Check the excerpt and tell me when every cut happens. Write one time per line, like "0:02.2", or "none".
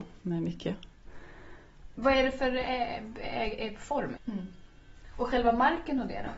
0:02.0
0:04.2